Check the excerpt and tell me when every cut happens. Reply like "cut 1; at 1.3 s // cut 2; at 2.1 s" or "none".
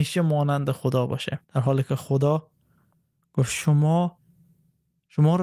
cut 1; at 1.4 s